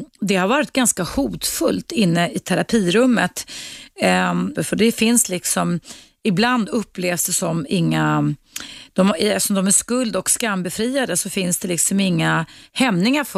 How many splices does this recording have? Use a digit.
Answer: 2